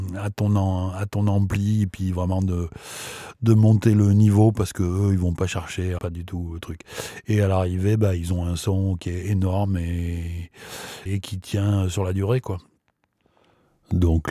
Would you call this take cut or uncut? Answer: cut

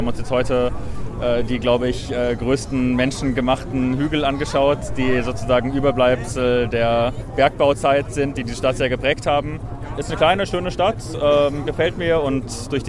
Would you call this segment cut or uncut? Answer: uncut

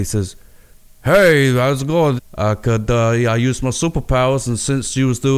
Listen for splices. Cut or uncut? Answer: cut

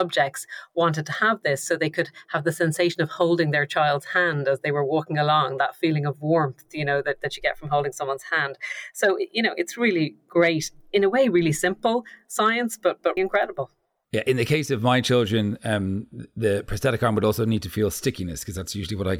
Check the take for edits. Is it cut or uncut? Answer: cut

